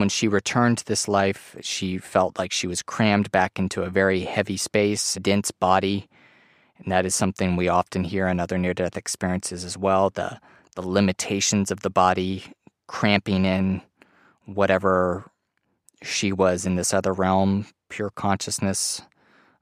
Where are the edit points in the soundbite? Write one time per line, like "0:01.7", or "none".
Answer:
0:05.1